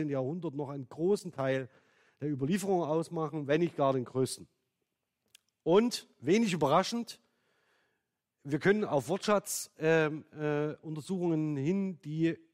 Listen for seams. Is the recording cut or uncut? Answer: uncut